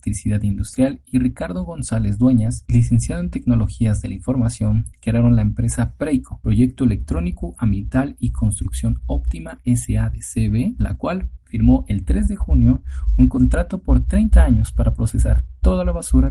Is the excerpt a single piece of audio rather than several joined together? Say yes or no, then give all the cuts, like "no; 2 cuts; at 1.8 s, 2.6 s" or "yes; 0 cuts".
yes; 0 cuts